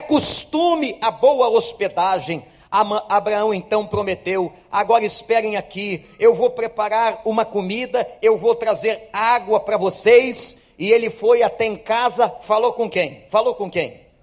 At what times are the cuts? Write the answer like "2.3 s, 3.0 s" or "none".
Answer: none